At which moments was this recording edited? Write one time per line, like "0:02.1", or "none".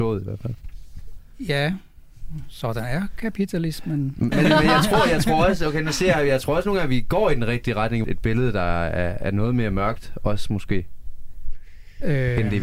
0:04.3
0:08.0
0:09.2